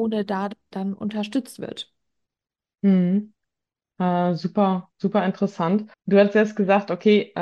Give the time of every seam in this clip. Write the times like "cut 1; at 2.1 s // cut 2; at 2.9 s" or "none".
none